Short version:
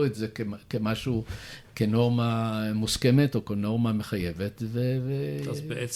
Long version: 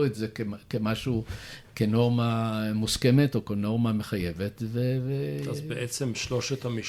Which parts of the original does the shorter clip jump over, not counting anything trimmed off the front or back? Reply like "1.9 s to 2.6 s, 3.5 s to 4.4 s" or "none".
none